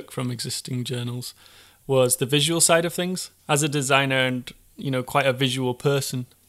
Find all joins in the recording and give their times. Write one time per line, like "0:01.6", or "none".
0:03.4